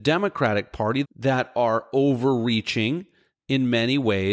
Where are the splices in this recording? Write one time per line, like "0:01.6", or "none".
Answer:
0:01.0